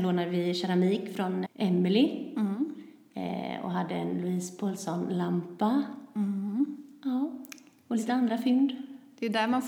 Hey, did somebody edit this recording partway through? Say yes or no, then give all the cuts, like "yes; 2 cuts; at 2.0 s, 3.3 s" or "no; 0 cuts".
yes; 1 cut; at 1.5 s